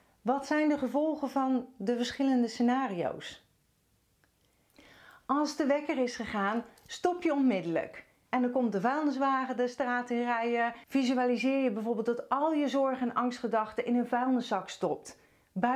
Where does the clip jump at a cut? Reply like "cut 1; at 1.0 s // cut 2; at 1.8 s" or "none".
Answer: cut 1; at 8.3 s // cut 2; at 10.8 s